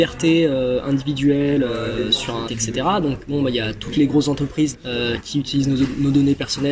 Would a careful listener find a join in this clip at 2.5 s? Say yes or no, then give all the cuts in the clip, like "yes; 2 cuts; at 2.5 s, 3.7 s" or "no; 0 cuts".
yes; 2 cuts; at 2.5 s, 4.7 s